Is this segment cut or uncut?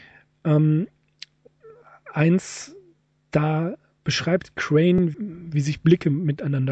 cut